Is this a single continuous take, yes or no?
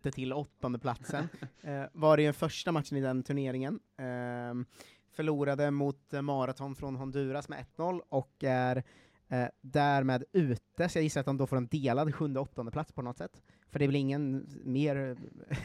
yes